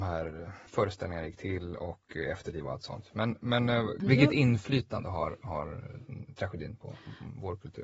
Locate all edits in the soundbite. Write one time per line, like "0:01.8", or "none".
none